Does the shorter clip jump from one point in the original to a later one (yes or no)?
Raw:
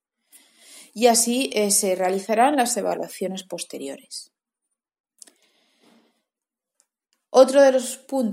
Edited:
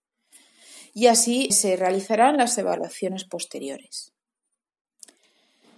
yes